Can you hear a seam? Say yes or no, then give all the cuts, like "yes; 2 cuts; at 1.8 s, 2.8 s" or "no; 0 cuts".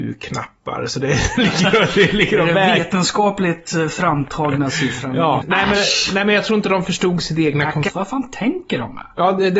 yes; 2 cuts; at 5.4 s, 7.9 s